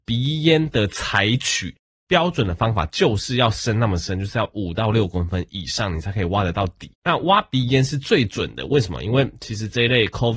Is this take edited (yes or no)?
yes